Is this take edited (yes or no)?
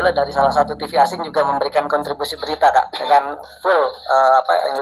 no